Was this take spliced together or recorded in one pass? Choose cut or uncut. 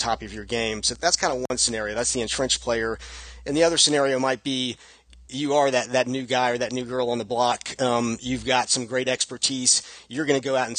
cut